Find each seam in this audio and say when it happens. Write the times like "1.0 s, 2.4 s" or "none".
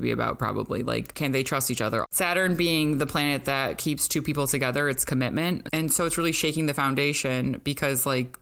2.0 s, 5.7 s